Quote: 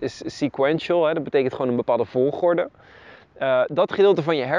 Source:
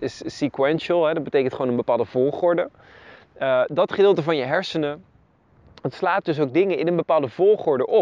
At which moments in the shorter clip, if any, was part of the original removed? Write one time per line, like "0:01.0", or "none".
none